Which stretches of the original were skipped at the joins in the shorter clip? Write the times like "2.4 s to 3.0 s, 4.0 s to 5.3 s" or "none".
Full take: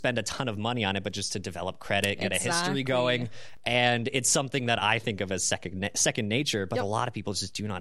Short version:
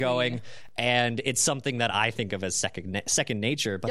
none